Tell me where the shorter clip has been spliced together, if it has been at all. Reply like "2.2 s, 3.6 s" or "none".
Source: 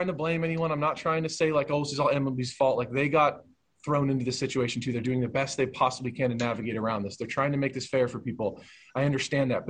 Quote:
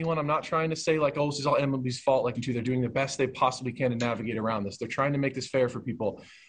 2.3 s